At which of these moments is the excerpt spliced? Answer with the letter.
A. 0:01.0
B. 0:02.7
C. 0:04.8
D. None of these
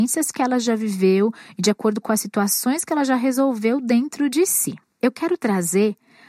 C